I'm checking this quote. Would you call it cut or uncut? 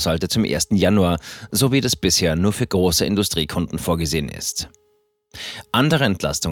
uncut